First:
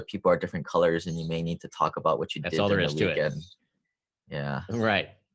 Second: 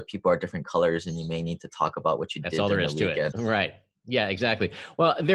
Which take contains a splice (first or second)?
second